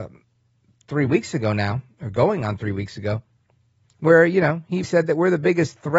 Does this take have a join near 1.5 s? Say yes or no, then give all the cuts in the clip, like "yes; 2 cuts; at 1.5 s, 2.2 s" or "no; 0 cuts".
no; 1 cut; at 4.8 s